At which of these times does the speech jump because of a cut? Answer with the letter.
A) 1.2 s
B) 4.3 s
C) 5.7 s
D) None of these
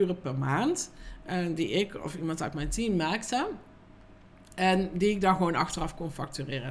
D